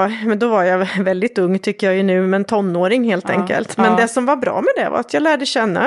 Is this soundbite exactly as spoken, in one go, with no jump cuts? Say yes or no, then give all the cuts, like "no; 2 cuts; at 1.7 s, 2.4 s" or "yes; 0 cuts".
yes; 0 cuts